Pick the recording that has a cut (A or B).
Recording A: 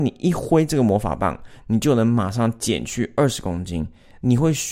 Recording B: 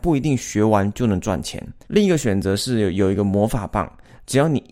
B